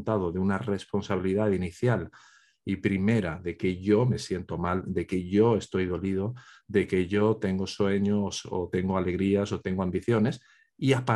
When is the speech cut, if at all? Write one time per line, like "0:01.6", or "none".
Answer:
none